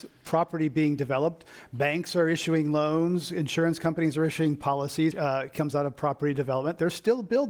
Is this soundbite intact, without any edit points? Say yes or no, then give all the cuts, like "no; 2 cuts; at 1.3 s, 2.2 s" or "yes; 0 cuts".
no; 1 cut; at 5.1 s